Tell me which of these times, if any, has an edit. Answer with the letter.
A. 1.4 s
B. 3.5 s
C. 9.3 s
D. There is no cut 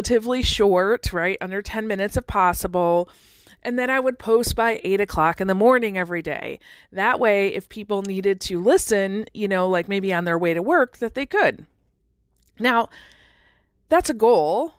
D